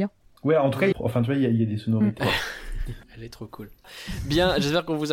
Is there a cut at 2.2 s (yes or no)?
yes